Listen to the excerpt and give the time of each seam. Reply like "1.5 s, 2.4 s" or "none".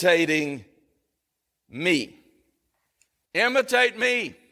3.2 s